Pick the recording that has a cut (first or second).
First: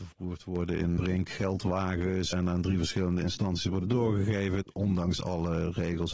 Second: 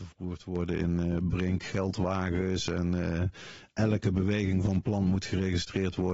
first